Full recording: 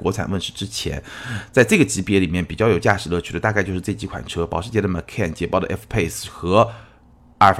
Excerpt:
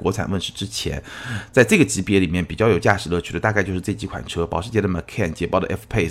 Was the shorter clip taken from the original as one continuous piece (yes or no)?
yes